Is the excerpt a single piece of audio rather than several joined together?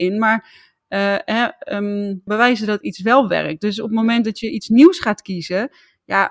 no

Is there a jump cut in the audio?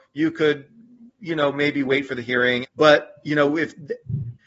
yes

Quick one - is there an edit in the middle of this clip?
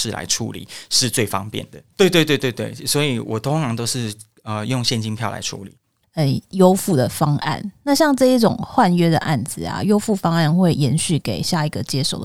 yes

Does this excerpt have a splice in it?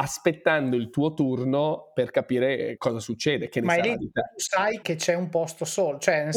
yes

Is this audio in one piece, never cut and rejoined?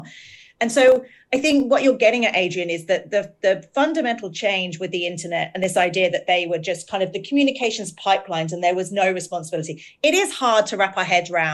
yes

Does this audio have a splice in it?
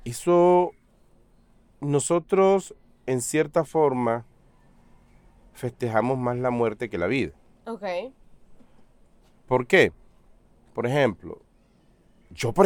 no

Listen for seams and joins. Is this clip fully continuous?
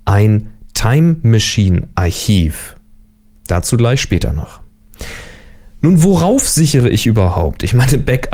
yes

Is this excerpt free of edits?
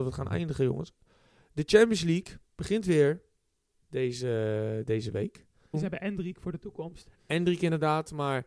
no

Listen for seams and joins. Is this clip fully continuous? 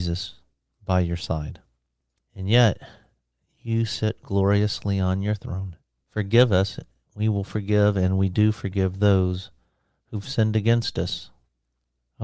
no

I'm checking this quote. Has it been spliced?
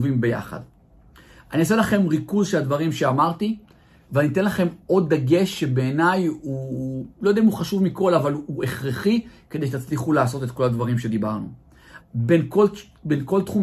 yes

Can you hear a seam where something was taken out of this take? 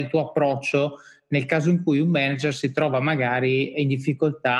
no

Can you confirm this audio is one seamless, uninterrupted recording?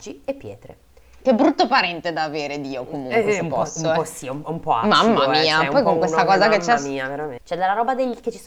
no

